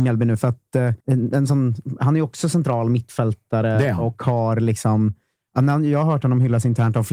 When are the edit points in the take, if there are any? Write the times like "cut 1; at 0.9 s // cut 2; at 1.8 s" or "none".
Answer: cut 1; at 1.0 s